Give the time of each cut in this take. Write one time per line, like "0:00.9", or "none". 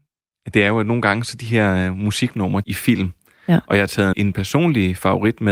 0:02.6
0:04.1